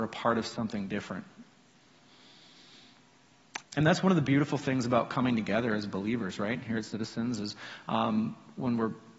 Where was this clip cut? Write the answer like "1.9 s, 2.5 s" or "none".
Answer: 3.6 s

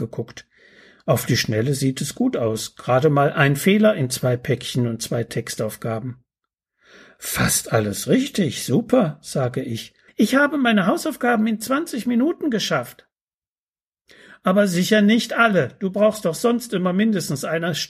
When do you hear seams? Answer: 10.1 s

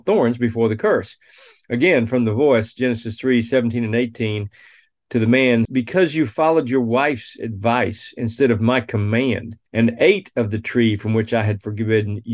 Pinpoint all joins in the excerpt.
5.7 s, 9.7 s

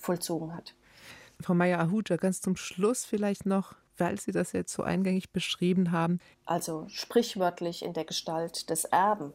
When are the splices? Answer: 6.3 s

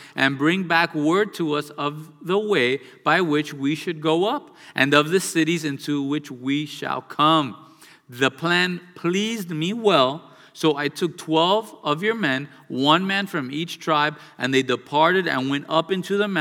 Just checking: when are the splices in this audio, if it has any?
none

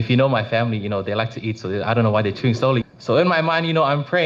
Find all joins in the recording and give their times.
2.8 s

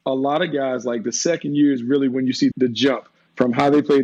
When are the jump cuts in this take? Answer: 2.5 s

